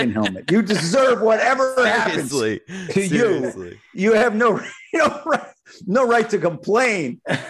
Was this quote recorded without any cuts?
yes; 0 cuts

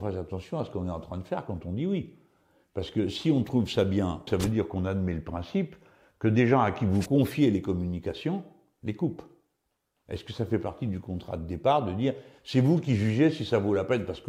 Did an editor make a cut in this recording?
yes; 1 cut; at 4.3 s

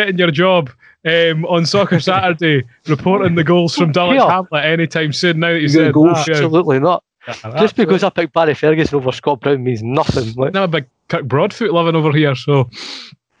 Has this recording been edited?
yes; 2 cuts; at 6.3 s, 10.5 s

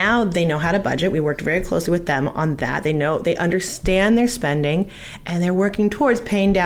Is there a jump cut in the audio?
no; 0 cuts

